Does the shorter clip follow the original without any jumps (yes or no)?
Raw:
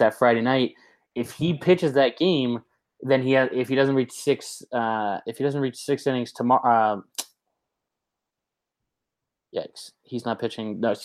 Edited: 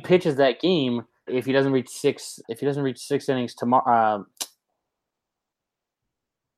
no